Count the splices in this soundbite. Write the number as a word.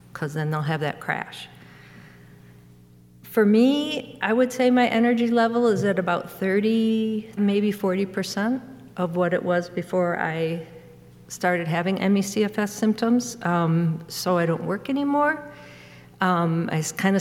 one